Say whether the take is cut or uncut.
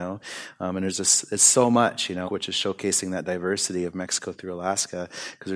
cut